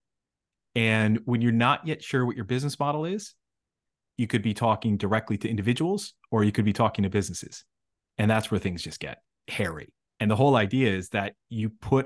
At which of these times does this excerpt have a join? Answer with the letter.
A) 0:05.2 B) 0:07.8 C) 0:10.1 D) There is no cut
C